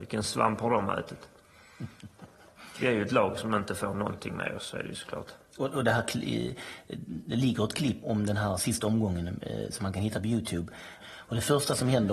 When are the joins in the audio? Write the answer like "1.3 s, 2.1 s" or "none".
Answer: 8.0 s, 11.0 s

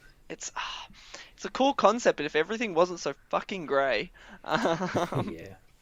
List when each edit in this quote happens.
none

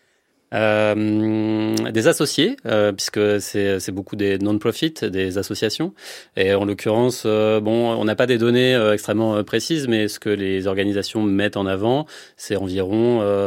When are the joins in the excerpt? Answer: none

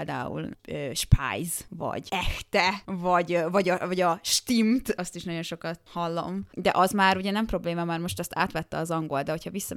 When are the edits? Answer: none

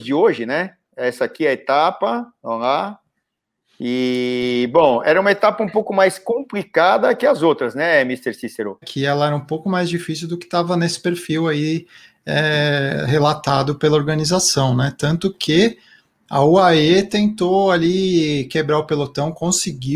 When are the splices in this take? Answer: 8.8 s

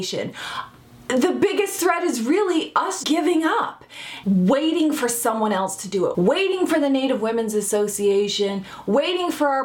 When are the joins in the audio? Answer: 3.0 s, 4.2 s, 6.1 s

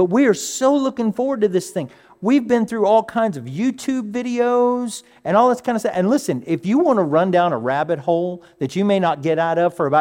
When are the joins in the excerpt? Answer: none

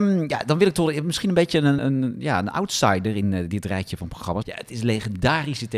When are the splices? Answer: 1.8 s, 4.4 s

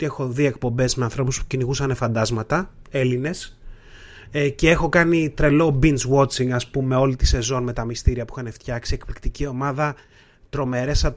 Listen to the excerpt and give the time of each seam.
none

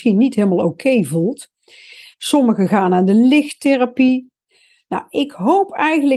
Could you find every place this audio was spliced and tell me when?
2.1 s

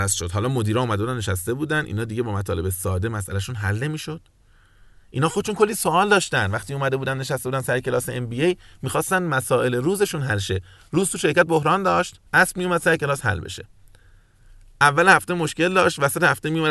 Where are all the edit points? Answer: 12.3 s

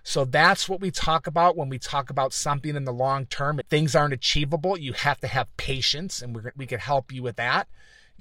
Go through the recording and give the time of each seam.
3.6 s

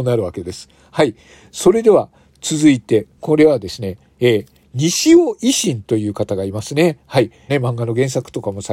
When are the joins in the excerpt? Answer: 3.2 s, 7.5 s

